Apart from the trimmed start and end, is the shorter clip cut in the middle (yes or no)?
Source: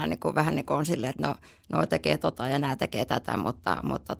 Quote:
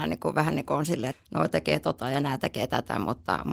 yes